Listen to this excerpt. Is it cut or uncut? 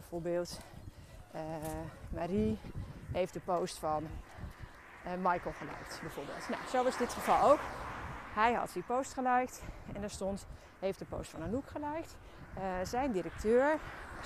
uncut